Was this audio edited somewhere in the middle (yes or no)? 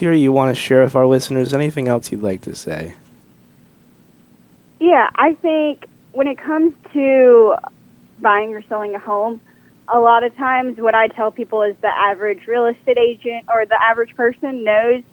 no